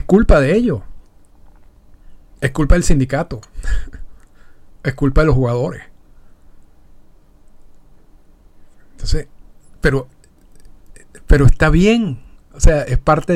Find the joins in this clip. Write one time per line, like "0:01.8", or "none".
none